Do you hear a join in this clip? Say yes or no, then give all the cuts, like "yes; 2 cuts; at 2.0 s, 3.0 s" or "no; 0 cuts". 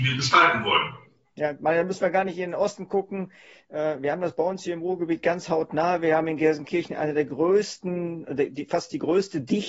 no; 0 cuts